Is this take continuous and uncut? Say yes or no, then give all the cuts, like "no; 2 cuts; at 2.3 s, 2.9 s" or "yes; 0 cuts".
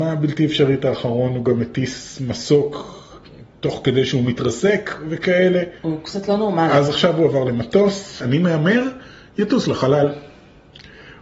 no; 2 cuts; at 5.8 s, 8.2 s